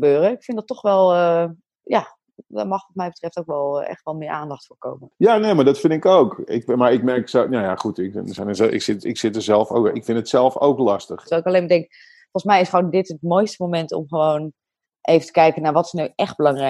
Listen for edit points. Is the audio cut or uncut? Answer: cut